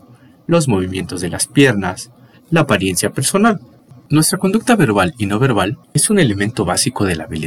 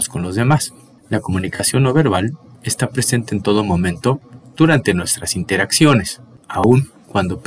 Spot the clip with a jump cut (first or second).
first